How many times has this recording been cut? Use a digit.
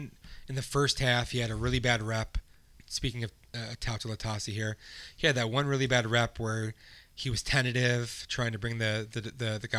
0